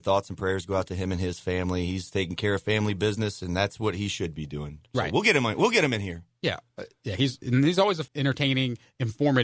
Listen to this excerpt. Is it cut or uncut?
cut